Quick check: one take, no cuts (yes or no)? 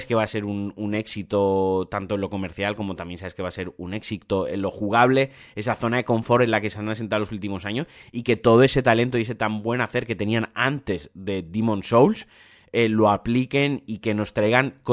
yes